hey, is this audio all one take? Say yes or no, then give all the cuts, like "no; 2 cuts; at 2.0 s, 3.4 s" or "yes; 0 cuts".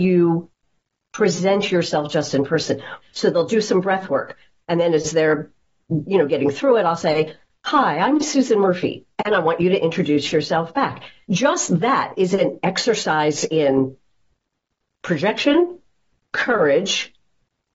no; 1 cut; at 3.0 s